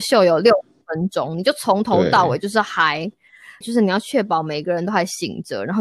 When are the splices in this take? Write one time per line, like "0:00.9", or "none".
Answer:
0:03.6